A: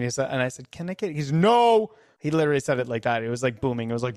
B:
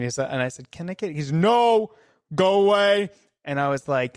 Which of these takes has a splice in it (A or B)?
A